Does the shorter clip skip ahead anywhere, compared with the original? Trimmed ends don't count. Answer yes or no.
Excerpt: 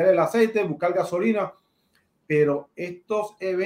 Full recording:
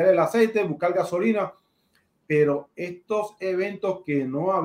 no